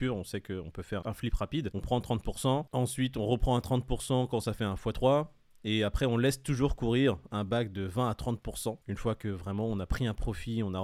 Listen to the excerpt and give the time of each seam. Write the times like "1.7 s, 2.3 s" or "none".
1.0 s, 8.8 s